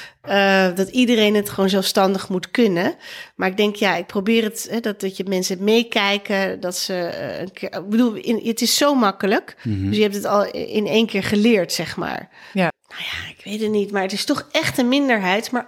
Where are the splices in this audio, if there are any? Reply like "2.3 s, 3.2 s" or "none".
12.7 s